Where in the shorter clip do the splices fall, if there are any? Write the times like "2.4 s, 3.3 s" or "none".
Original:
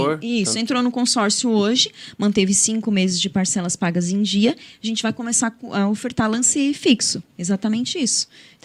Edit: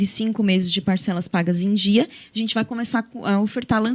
none